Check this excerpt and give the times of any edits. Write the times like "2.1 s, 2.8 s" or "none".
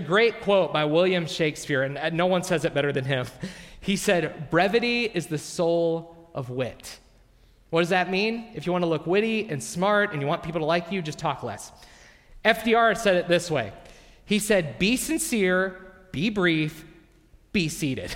none